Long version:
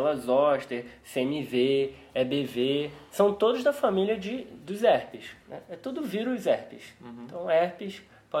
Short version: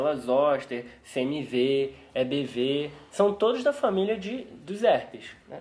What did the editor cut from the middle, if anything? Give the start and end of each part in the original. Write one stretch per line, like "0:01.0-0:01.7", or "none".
none